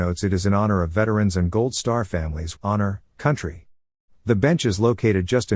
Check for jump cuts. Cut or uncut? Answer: cut